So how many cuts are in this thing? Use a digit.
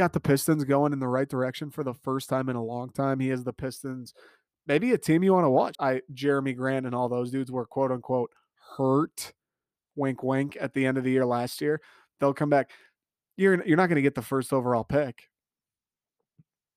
1